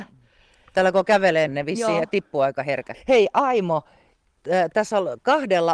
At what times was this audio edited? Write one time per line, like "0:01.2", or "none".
0:01.5
0:02.9